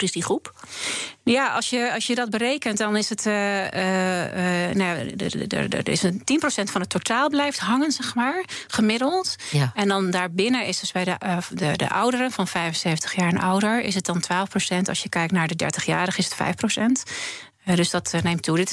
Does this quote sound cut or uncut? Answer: uncut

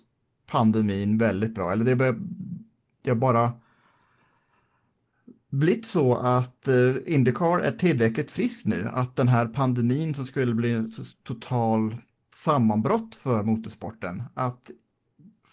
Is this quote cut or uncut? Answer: uncut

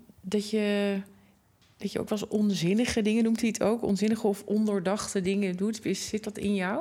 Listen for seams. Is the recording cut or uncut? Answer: uncut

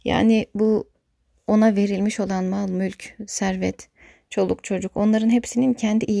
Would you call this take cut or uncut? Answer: uncut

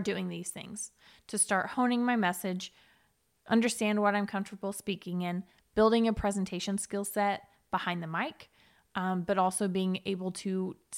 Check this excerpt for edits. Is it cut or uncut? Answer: uncut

